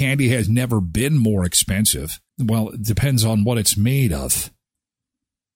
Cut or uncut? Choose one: cut